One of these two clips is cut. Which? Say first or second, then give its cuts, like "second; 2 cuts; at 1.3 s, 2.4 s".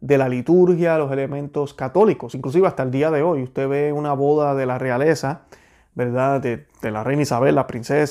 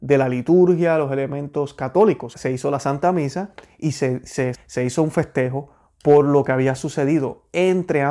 second; 2 cuts; at 2.3 s, 4.5 s